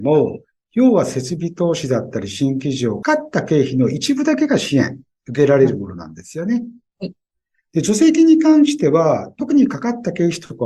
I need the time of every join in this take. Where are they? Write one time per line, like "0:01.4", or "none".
0:03.0